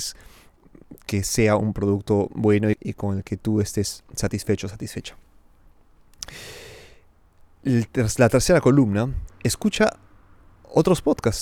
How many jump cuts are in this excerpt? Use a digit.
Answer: 2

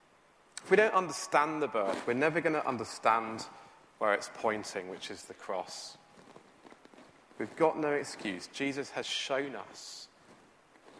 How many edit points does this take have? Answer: 0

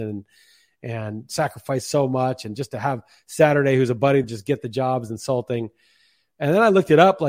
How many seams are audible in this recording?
1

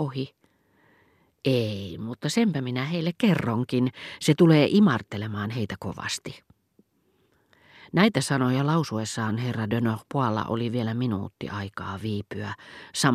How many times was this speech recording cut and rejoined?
0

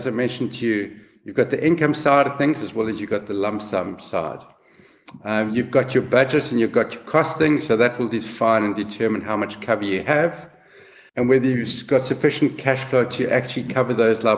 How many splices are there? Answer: 1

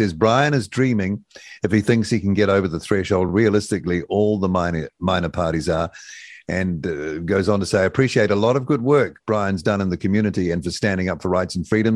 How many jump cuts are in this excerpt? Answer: 0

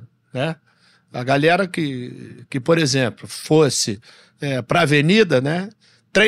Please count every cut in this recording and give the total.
0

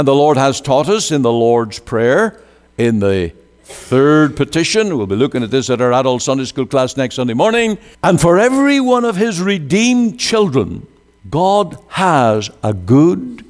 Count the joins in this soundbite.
1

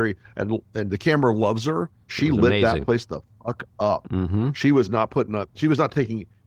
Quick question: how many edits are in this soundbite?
1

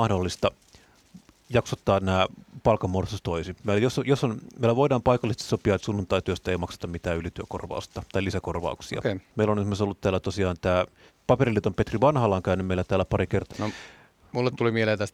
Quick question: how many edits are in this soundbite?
2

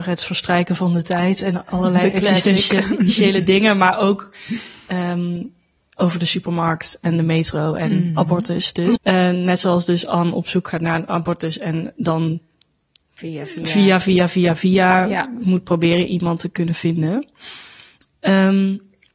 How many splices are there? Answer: 1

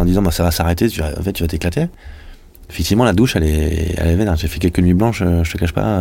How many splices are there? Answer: 0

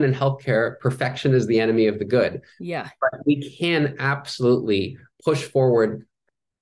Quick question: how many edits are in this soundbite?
0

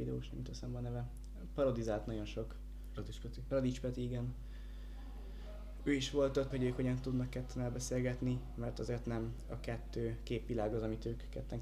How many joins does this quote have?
1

